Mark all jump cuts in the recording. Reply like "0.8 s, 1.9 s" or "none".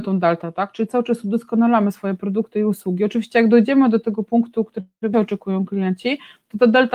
none